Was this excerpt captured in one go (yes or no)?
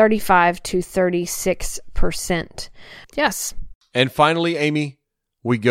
no